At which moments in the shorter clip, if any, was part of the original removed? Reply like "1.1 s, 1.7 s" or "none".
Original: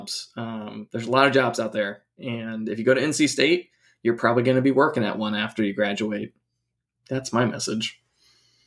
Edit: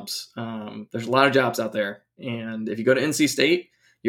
none